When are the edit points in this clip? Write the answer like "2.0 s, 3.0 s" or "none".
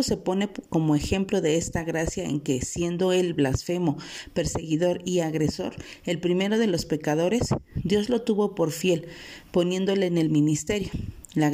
none